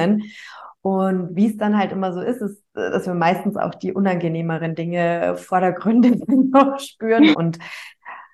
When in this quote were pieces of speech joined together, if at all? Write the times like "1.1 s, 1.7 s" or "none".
7.3 s